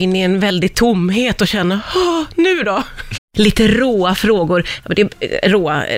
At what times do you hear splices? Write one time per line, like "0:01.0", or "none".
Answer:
0:03.2